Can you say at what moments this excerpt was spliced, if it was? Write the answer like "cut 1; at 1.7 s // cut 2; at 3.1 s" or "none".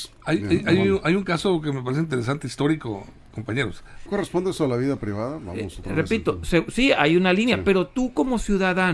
cut 1; at 4.1 s